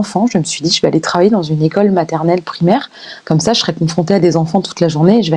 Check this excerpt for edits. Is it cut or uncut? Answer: uncut